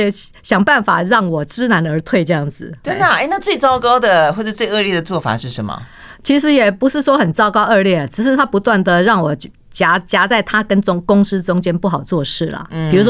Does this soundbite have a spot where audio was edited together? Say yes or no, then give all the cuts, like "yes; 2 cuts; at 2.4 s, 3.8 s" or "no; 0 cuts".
no; 0 cuts